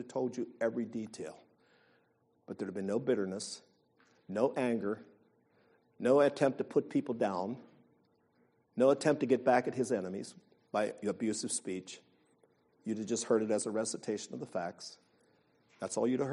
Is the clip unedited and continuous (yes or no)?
yes